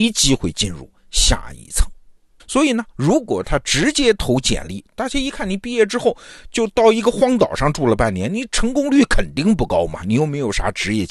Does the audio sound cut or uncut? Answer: cut